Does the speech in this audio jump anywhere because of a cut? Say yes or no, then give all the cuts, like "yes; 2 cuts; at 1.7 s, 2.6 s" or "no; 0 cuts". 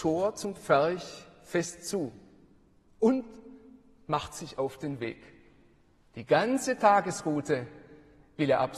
no; 0 cuts